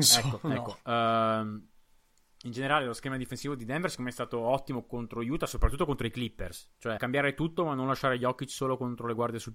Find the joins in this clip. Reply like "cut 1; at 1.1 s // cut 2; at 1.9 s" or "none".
cut 1; at 7.0 s